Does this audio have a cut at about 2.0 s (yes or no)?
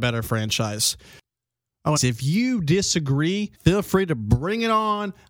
yes